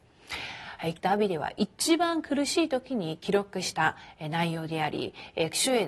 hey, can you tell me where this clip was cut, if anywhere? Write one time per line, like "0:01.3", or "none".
0:01.0